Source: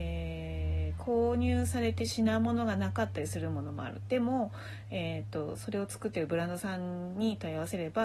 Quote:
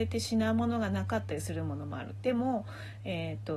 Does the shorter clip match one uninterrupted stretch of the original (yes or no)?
yes